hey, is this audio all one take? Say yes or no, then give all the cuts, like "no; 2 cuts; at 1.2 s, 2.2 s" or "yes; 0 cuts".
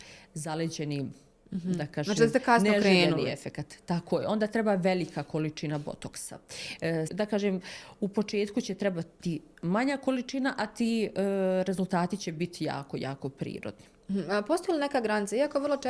no; 1 cut; at 7.1 s